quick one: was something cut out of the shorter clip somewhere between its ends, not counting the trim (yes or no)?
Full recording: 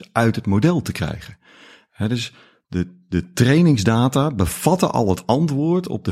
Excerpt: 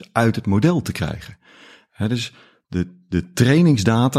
no